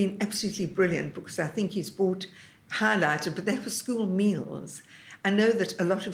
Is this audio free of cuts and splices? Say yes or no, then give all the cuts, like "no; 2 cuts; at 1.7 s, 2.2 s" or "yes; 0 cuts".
yes; 0 cuts